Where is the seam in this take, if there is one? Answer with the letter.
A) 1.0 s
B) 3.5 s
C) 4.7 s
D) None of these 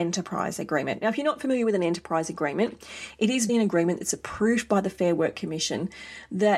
B